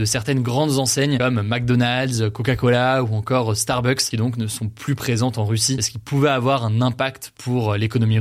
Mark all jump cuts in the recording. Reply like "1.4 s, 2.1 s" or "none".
none